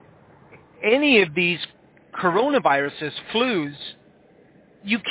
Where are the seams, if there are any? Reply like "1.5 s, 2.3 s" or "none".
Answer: none